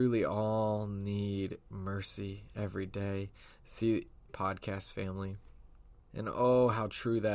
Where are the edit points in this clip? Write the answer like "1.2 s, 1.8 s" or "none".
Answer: 4.3 s, 6.1 s